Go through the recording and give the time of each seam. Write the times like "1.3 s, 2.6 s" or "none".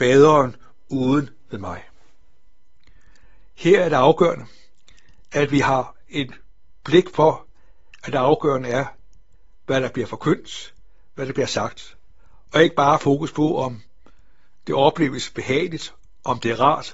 none